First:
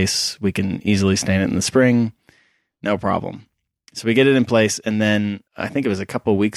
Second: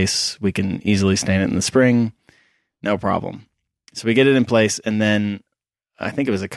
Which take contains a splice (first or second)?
first